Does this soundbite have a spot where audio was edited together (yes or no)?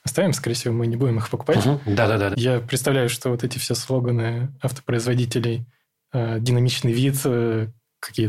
yes